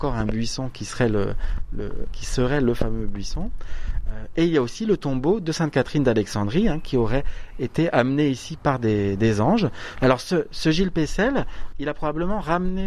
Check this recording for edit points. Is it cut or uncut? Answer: cut